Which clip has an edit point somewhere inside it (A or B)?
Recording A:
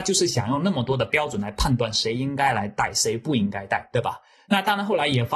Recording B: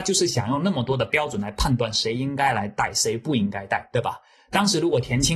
A